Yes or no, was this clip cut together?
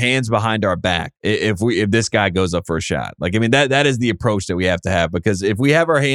yes